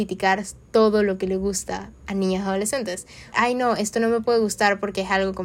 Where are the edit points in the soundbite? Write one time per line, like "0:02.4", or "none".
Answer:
0:03.3